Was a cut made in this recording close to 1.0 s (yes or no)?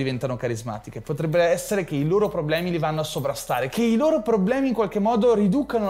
no